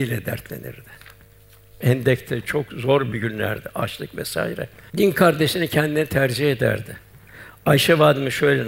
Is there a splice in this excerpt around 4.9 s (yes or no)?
yes